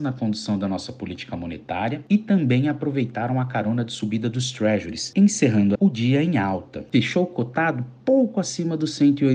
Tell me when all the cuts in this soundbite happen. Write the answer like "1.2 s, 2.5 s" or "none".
5.8 s, 6.9 s